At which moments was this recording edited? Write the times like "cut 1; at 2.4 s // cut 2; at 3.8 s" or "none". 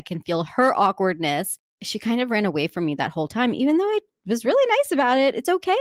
none